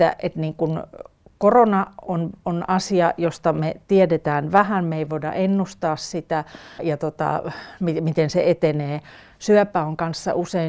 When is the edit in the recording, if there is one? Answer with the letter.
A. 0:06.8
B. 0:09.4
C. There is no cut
A